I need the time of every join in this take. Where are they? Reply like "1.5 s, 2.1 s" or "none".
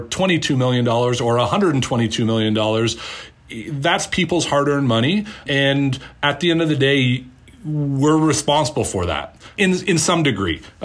none